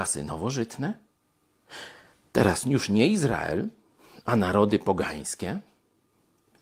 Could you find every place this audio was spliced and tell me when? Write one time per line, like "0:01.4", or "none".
none